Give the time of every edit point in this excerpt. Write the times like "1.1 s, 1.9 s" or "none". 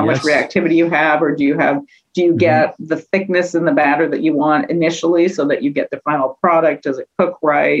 none